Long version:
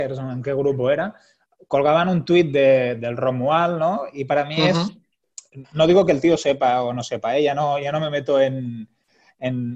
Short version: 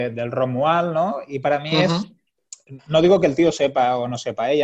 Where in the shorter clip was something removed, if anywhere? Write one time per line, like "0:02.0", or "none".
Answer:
none